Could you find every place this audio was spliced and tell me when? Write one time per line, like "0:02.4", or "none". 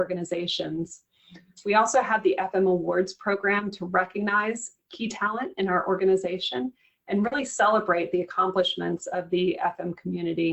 none

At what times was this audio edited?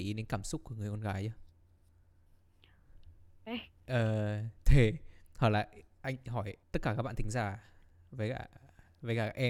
0:03.5
0:06.6

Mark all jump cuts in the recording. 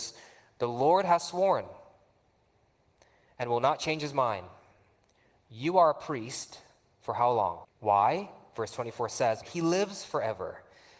0:07.6
0:09.4

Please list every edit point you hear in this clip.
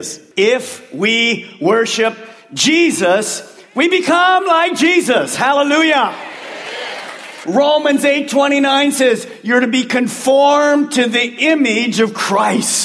0:07.4

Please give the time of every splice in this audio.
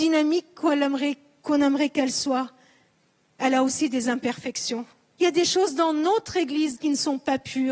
0:05.2
0:06.8

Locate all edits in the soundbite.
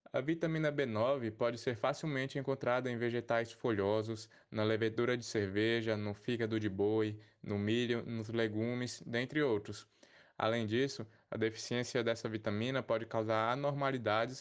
0:10.2

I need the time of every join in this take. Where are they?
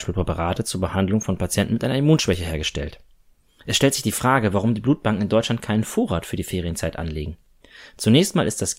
none

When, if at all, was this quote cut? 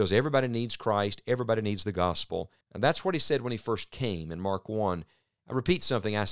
0:02.6
0:05.4

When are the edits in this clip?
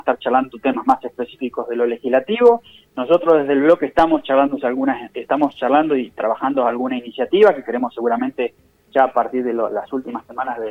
none

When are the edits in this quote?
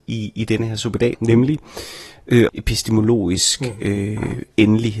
0:01.1
0:02.5

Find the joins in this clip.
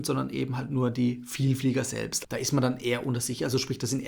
0:02.2

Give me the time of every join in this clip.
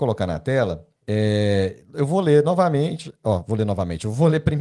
0:01.0

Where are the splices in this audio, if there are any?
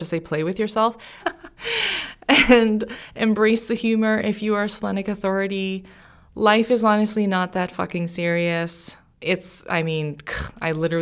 0:01.2

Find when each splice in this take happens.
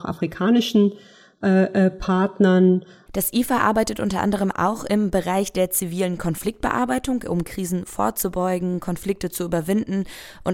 0:03.1

